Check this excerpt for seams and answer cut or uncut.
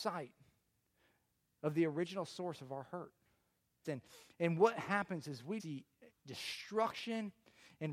cut